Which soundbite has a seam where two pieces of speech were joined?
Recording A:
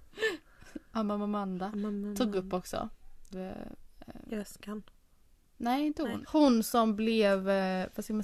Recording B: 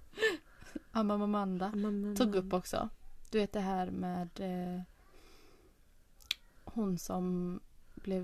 A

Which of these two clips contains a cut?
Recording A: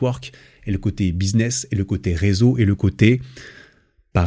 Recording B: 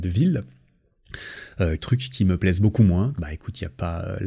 B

